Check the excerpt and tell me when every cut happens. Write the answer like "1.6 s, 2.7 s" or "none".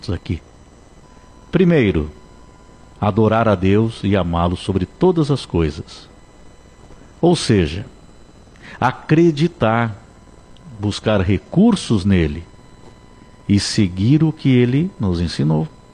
none

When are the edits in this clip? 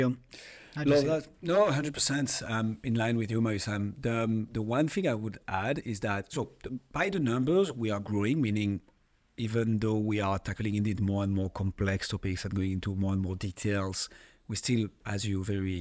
none

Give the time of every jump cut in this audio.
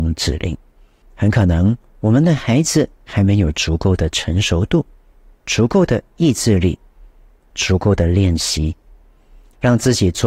1.0 s

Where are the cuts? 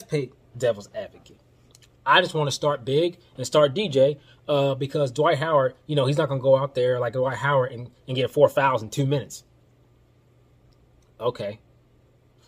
none

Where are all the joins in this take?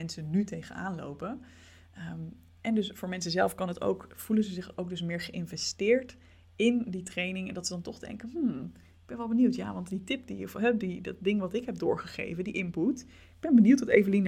none

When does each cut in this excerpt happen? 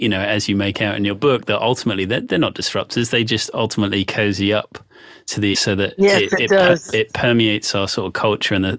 5.5 s

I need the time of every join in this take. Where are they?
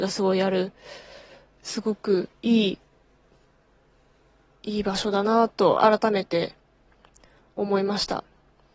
none

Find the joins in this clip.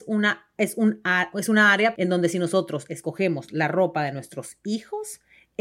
1.9 s

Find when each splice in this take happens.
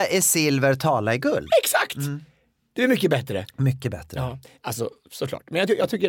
none

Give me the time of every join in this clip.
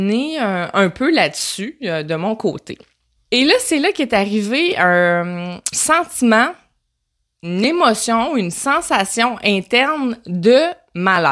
3.2 s, 5.7 s

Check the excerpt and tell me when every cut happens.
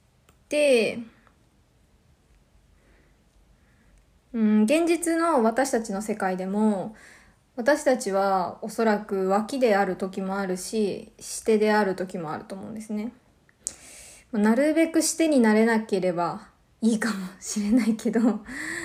none

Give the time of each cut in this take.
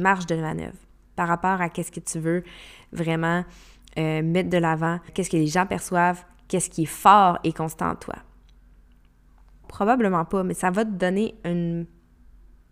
5.1 s, 9.6 s

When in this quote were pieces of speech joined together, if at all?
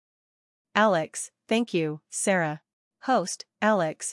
2.9 s

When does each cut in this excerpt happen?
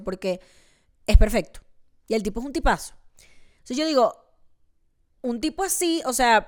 none

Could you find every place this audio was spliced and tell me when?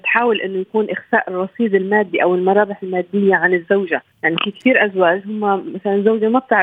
4.1 s

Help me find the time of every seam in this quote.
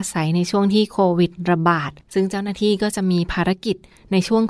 2.0 s

